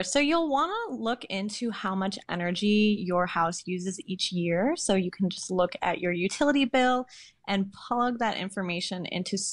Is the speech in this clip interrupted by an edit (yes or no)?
no